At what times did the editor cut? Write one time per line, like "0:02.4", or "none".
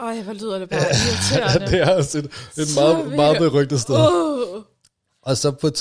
none